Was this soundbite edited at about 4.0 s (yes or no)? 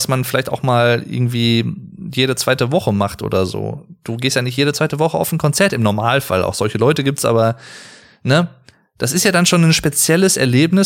no